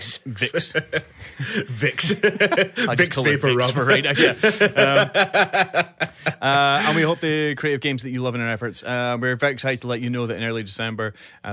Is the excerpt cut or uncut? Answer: uncut